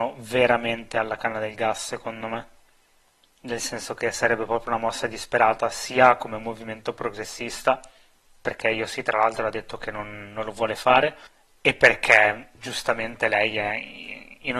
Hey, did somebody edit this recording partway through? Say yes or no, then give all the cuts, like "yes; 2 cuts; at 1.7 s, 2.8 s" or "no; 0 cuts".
no; 0 cuts